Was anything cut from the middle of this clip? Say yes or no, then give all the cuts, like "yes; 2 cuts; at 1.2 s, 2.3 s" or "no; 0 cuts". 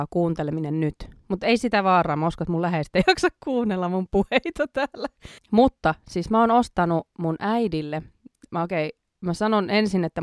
yes; 1 cut; at 5.4 s